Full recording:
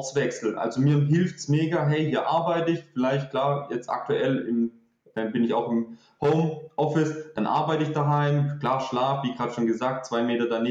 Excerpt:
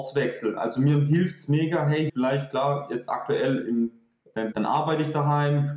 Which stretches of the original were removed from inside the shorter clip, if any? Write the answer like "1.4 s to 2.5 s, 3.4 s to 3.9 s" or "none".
2.1 s to 2.9 s, 5.3 s to 7.3 s